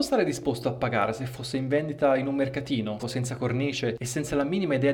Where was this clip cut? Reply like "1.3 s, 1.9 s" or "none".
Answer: 3.0 s